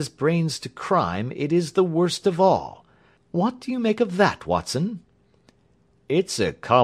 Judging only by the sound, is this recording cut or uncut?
cut